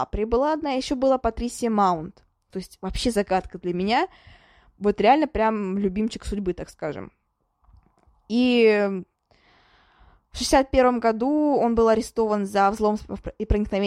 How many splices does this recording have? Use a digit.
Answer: 1